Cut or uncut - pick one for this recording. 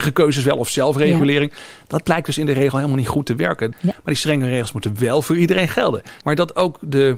cut